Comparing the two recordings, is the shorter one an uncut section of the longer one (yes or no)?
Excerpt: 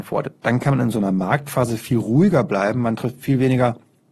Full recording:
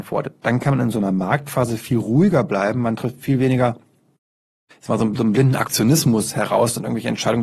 yes